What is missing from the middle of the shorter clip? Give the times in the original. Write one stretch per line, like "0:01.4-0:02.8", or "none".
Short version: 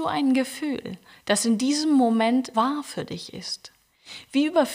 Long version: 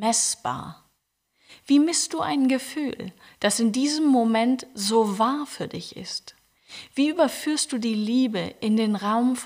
0:04.7-0:05.2